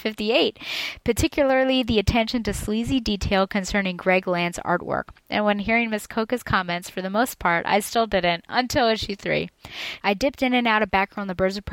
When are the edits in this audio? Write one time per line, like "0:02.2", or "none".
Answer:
0:05.2
0:10.0